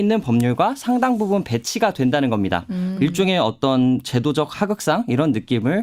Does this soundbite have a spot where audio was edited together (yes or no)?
yes